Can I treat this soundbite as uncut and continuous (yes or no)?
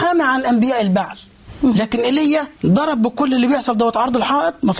no